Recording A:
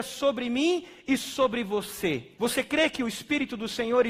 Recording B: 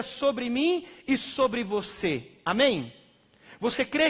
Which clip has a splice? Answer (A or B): A